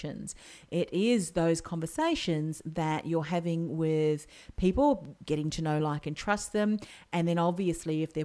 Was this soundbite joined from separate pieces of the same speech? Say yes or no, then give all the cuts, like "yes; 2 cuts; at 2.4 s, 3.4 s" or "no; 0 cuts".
no; 0 cuts